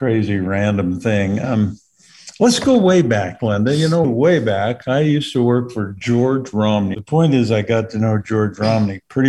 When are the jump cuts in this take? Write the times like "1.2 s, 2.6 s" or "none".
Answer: 4.0 s, 6.9 s